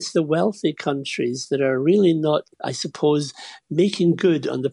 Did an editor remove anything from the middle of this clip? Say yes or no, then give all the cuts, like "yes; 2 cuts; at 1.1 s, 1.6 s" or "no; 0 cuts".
yes; 1 cut; at 2.5 s